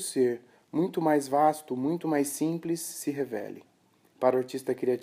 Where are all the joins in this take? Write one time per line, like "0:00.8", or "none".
0:04.1